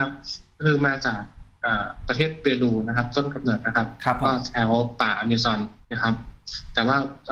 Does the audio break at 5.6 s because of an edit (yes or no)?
no